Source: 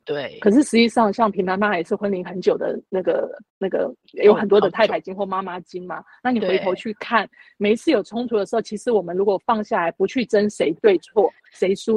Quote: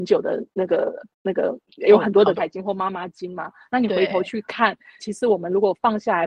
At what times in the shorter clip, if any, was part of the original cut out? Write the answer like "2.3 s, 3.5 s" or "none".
2.4 s, 5.0 s